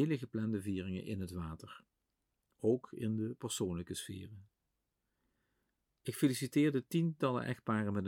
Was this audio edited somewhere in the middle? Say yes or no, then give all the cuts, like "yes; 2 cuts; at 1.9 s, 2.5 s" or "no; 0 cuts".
no; 0 cuts